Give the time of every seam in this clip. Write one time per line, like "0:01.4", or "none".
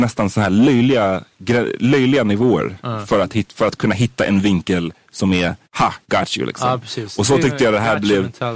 0:05.6